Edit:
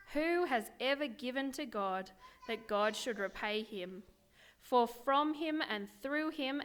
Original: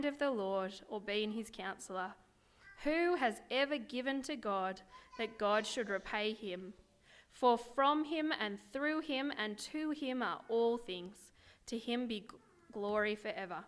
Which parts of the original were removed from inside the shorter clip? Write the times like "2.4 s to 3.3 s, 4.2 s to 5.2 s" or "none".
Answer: none

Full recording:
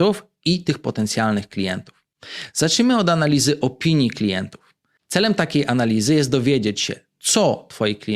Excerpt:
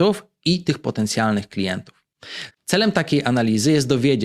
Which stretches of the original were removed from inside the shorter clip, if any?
2.5 s to 4.9 s

